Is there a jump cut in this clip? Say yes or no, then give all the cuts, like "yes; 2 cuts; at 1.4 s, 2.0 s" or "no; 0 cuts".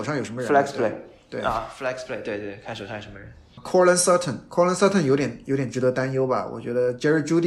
no; 0 cuts